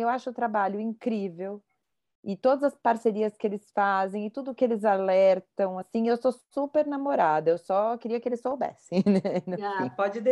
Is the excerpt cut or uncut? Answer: uncut